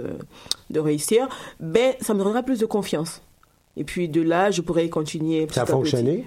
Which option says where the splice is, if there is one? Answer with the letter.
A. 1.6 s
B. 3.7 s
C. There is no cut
C